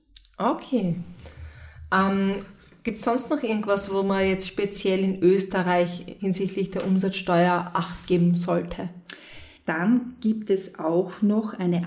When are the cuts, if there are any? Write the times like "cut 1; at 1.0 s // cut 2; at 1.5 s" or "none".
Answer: cut 1; at 6.2 s // cut 2; at 9.6 s

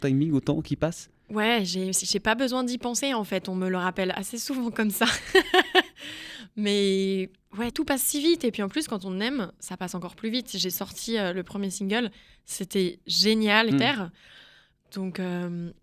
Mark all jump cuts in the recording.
cut 1; at 7.7 s // cut 2; at 13.7 s

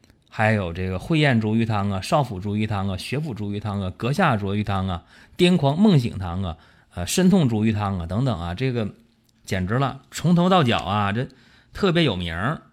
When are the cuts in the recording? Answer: none

